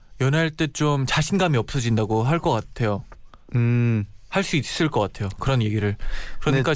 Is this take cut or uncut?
uncut